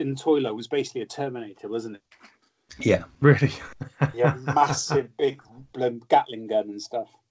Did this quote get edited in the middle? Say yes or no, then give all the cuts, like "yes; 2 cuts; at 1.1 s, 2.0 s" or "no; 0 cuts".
no; 0 cuts